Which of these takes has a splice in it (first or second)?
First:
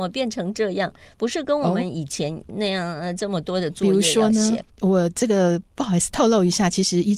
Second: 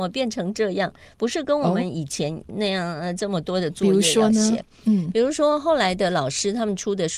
first